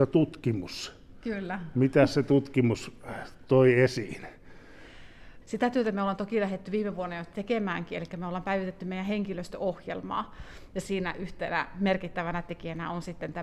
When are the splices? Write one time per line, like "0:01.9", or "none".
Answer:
0:05.4